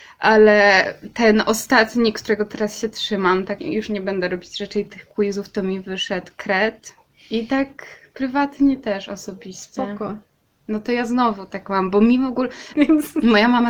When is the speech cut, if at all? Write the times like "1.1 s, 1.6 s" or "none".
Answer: 3.6 s, 7.1 s, 12.7 s